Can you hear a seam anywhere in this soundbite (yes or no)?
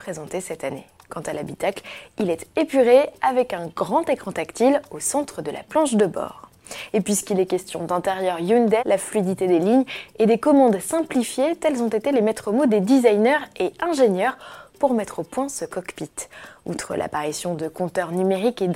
yes